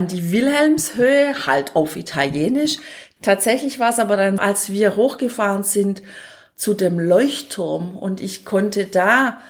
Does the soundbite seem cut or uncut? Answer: cut